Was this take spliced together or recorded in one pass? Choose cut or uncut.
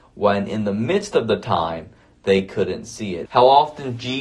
cut